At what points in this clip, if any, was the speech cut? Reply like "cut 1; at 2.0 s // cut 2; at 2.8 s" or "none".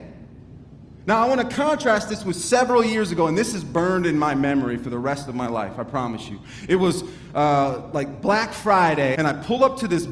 cut 1; at 9.1 s